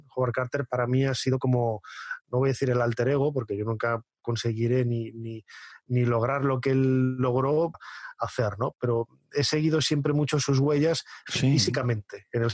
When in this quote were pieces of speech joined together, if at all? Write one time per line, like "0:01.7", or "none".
0:07.7